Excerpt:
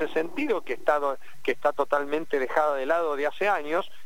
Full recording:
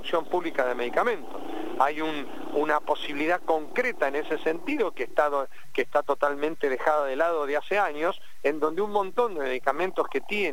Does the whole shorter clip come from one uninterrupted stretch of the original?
yes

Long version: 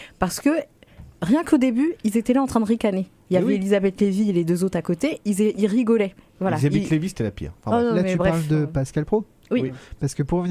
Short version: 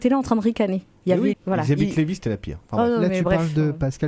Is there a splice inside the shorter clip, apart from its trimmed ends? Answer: yes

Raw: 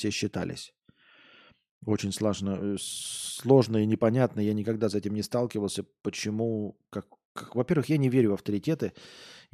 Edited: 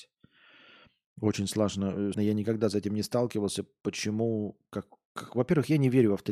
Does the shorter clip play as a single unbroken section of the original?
no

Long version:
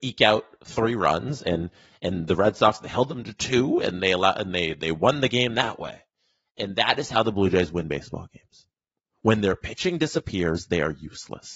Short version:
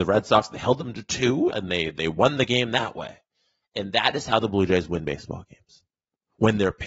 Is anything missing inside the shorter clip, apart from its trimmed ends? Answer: yes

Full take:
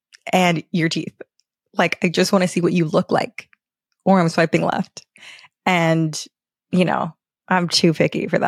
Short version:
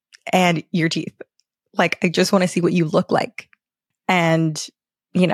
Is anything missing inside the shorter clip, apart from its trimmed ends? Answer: yes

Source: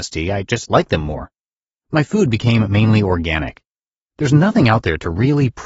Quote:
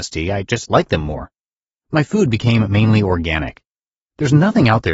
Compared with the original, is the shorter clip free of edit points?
yes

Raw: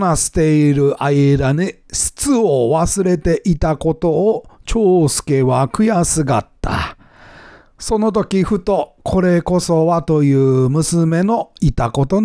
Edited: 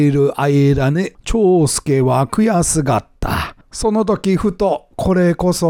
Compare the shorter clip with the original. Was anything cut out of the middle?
yes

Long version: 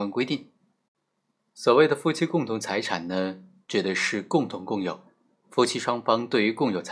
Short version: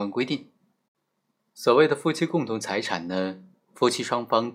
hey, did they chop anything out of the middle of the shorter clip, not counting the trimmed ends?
yes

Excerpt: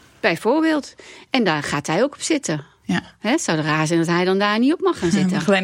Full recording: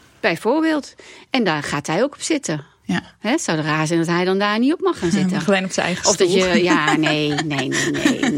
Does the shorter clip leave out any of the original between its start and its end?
no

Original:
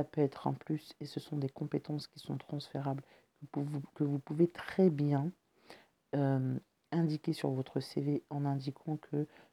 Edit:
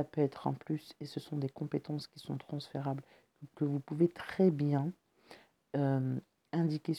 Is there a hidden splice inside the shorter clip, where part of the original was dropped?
yes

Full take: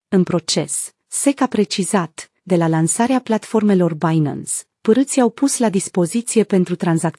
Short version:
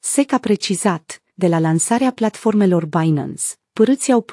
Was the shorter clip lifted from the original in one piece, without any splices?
yes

